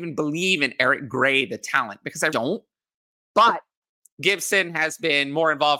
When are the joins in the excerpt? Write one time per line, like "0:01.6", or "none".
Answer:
0:02.3
0:04.1